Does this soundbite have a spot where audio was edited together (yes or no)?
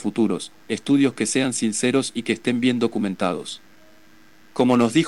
no